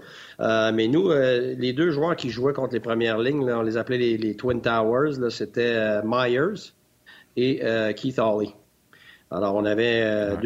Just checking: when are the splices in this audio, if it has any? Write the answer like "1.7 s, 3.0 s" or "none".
none